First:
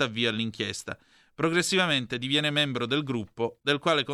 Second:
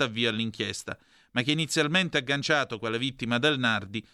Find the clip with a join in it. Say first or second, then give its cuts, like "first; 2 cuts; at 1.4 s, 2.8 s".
first; 1 cut; at 1.3 s